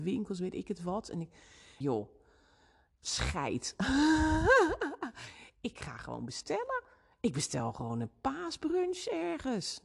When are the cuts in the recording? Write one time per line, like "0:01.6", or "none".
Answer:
0:01.8